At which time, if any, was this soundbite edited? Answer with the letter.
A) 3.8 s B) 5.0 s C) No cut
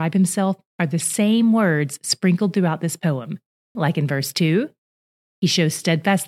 A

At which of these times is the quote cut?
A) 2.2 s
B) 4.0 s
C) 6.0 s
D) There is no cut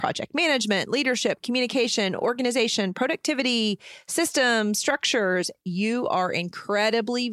D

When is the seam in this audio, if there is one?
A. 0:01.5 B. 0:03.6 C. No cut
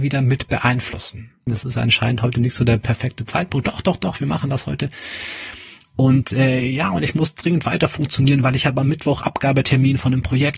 A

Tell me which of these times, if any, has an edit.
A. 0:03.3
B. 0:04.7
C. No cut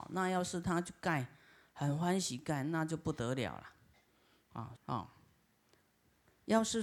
B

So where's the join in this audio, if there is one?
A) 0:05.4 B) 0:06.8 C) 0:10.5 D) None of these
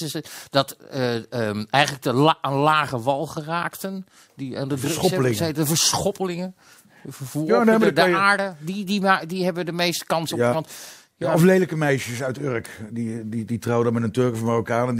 C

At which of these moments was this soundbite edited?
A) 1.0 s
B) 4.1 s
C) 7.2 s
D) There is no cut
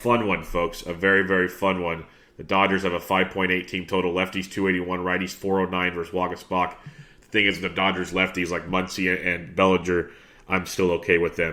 D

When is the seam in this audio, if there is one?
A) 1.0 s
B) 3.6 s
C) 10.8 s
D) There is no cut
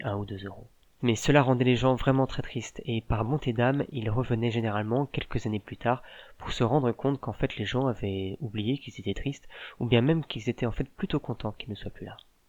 A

